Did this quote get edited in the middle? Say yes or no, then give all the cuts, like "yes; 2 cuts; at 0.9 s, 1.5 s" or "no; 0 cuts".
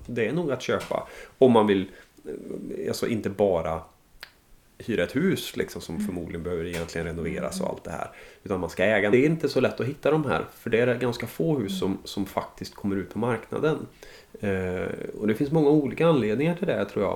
no; 0 cuts